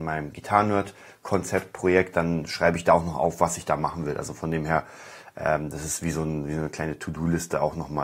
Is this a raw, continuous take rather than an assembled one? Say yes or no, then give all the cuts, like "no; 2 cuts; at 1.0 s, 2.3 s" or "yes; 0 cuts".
yes; 0 cuts